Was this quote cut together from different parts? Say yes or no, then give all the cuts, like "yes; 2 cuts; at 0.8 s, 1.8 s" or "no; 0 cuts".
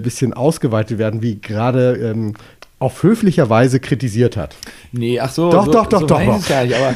yes; 1 cut; at 2.6 s